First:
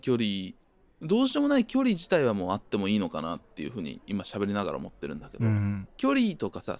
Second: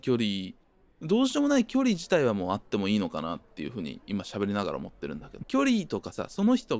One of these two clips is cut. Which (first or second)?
second